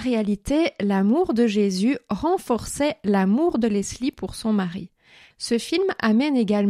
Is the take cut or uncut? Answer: cut